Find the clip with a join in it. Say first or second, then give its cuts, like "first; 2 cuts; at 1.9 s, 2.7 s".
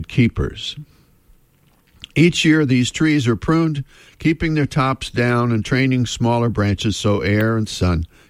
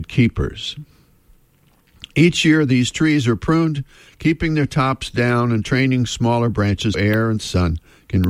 second; 1 cut; at 6.9 s